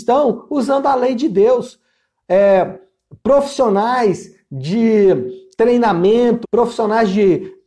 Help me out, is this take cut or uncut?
cut